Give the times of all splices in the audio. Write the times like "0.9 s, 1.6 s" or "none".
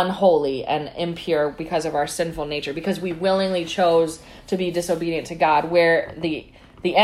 none